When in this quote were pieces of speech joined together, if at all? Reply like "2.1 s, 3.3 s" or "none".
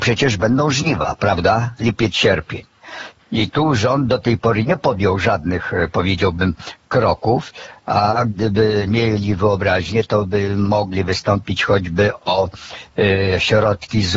3.2 s